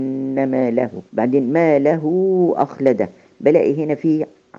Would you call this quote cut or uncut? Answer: cut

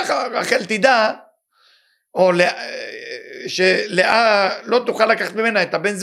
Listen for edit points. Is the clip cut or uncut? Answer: uncut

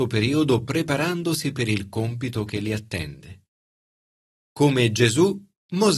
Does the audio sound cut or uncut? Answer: cut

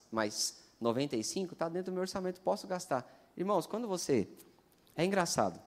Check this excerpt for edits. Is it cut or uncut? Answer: uncut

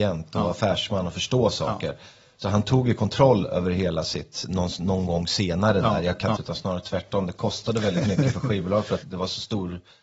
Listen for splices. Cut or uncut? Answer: cut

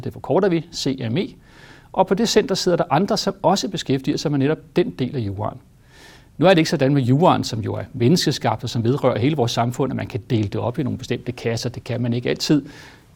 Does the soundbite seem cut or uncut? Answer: uncut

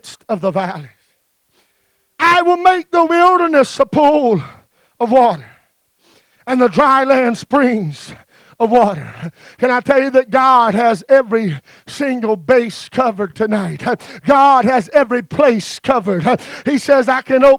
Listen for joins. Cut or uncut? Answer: uncut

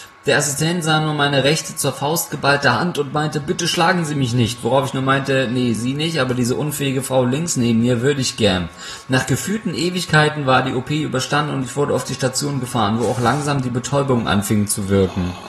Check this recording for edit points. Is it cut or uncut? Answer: uncut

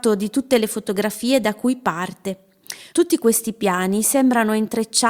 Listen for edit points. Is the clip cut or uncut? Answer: cut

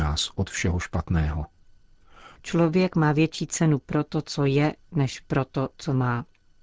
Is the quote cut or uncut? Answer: cut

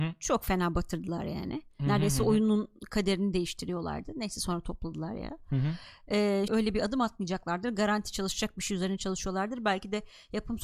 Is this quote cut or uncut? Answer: cut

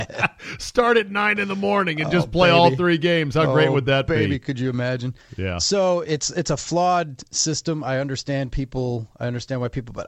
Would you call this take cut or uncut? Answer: uncut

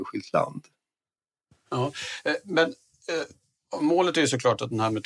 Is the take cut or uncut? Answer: uncut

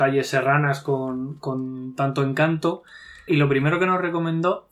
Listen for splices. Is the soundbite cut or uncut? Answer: cut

